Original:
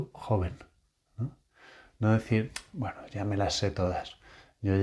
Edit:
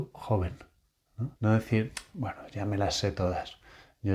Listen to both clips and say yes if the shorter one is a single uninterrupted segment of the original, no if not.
no